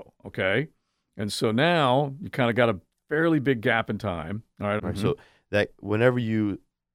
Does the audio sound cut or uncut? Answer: cut